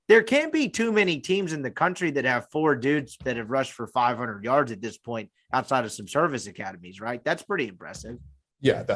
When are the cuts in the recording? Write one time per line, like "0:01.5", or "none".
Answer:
none